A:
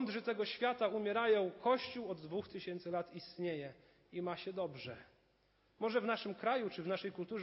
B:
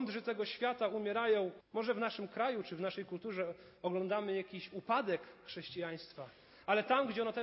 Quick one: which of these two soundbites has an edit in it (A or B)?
B